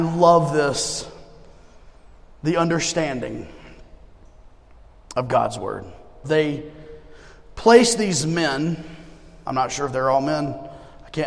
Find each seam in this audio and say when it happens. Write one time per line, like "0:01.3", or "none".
0:06.2
0:09.4